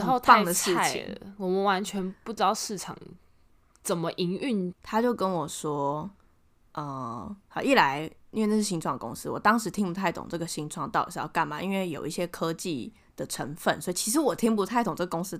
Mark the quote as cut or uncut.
cut